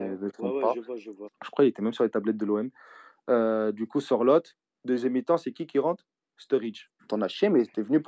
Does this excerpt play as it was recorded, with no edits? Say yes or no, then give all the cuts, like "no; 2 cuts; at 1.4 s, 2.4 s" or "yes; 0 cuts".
no; 2 cuts; at 1.3 s, 7.0 s